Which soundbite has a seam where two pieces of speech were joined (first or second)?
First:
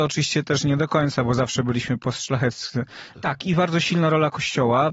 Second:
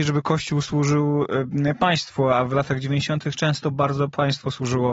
first